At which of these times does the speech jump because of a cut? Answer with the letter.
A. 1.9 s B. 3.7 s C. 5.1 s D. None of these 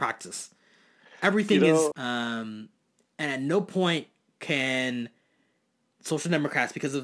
A